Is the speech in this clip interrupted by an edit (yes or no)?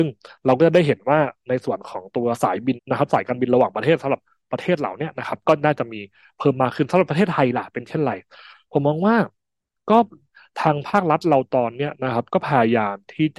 yes